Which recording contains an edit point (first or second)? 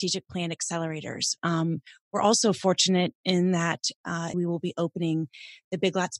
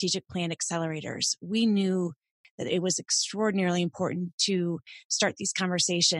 first